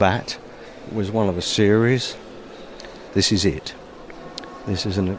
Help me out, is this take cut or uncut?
cut